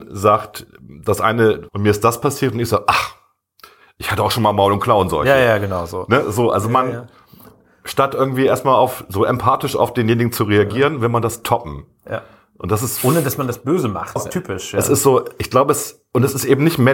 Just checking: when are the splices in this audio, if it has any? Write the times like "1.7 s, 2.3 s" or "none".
1.7 s, 14.2 s